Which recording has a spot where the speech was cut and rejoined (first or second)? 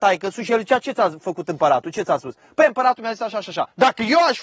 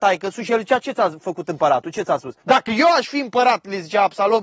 second